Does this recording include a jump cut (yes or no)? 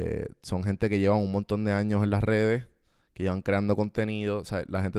no